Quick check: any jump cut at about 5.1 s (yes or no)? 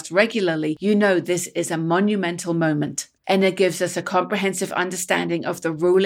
no